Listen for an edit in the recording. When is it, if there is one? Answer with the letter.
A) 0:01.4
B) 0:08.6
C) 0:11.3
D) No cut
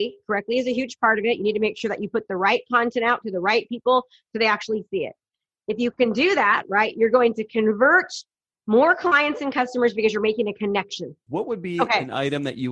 C